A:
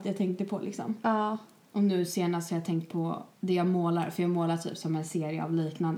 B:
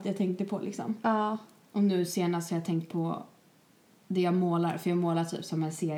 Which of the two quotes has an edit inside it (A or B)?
A